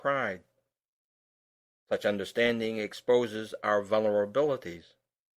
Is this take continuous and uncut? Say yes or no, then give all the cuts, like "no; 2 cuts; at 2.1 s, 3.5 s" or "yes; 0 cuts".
yes; 0 cuts